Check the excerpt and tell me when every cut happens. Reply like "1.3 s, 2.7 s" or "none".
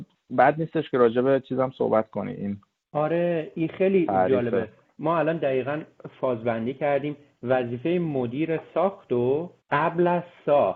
9.6 s